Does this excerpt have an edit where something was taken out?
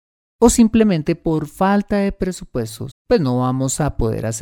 yes; 1 cut; at 2.9 s

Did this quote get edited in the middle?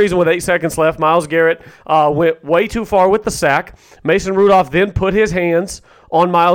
no; 0 cuts

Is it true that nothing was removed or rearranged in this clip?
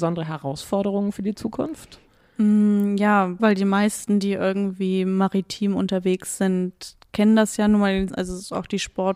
no; 2 cuts; at 3.4 s, 8.1 s

